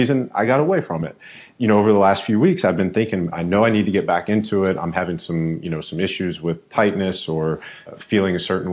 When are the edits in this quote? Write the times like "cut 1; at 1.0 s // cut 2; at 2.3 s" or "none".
cut 1; at 3.3 s